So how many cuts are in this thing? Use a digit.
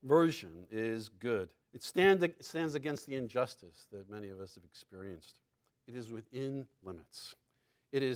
2